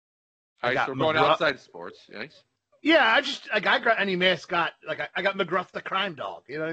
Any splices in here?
no; 0 cuts

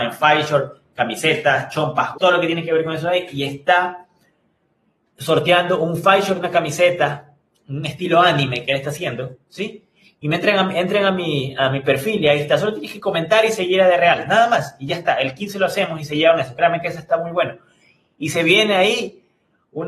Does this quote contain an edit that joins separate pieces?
yes; 1 cut; at 2.1 s

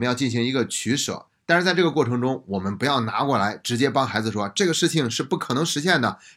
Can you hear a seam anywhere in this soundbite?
no; 0 cuts

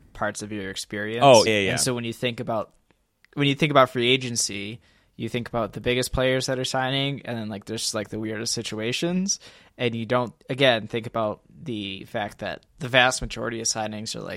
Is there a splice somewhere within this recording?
yes; 2 cuts; at 1.5 s, 10.4 s

